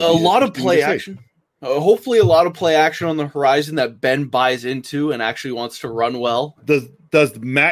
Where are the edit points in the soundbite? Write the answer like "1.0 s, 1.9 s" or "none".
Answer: 6.6 s